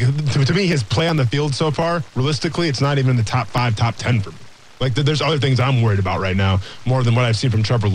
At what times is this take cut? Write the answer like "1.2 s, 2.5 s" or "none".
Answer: none

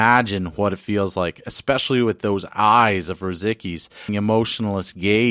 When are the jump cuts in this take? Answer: 4.1 s

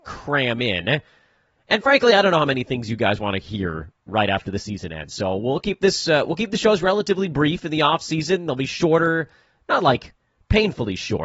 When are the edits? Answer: none

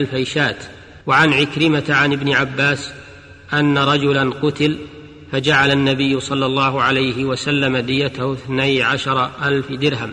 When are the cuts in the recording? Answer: 1.0 s

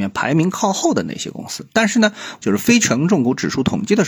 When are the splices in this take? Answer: 2.4 s

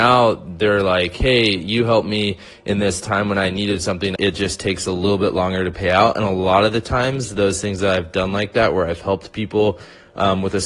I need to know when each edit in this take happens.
4.2 s

